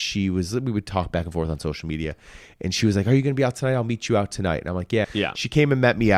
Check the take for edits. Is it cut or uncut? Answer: cut